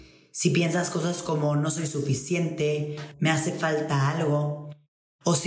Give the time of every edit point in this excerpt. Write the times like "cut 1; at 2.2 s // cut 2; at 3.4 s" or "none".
cut 1; at 3.1 s